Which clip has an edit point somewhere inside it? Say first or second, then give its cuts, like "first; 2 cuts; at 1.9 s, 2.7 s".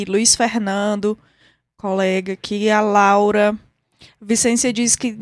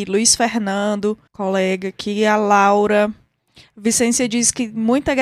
second; 1 cut; at 1.3 s